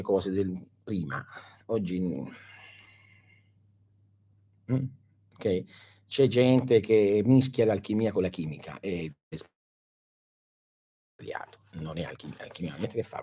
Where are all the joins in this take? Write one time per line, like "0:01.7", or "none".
none